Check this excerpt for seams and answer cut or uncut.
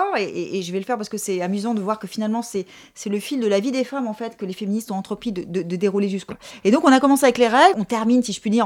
cut